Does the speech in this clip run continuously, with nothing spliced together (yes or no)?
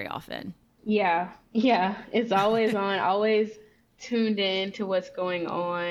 yes